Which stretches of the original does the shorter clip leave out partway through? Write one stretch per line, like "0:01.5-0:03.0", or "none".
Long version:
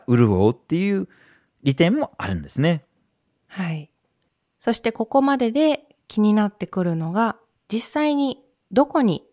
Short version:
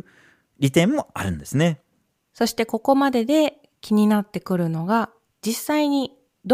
0:03.1-0:04.4